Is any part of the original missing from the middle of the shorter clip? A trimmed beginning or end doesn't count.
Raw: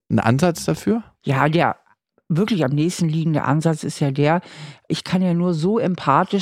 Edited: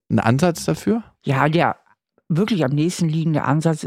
no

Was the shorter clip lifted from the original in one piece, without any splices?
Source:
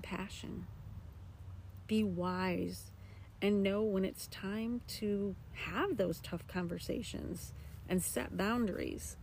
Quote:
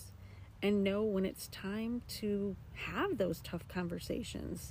yes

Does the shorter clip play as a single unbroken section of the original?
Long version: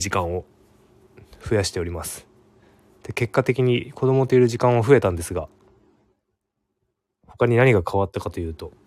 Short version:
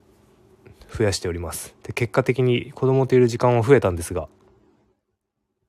no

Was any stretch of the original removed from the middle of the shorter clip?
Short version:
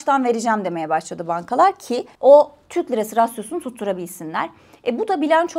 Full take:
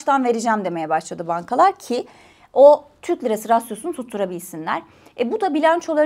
yes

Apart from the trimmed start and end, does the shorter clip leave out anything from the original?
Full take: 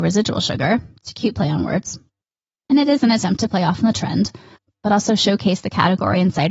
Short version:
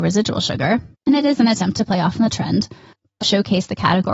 yes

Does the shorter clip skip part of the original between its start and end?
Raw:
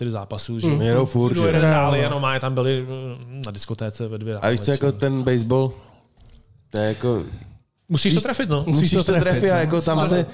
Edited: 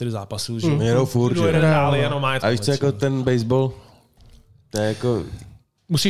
yes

